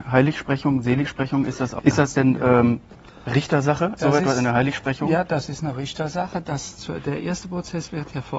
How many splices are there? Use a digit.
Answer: 2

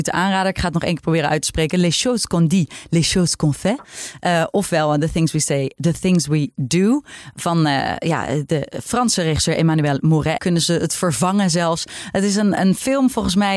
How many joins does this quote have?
1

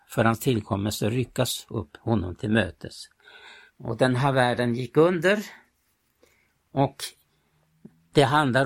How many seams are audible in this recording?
1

